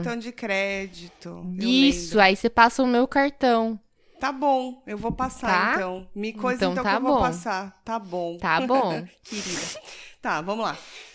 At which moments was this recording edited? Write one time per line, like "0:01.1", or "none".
none